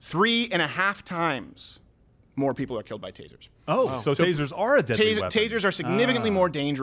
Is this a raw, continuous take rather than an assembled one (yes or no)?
yes